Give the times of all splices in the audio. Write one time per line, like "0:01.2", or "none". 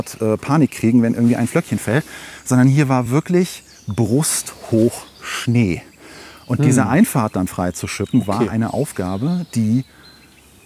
none